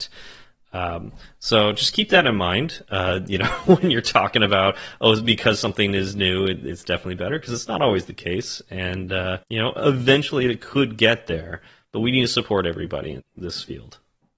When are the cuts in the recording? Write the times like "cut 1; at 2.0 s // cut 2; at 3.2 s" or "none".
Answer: cut 1; at 9.4 s // cut 2; at 13.2 s